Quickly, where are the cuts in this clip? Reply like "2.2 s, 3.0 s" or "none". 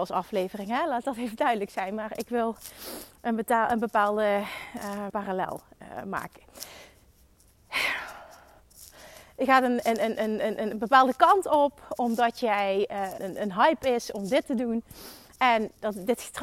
5.1 s, 13.2 s, 15.4 s